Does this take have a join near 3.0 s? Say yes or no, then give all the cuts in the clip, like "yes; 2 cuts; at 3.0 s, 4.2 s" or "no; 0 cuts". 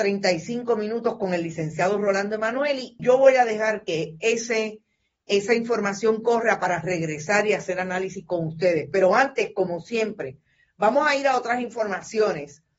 yes; 1 cut; at 3.0 s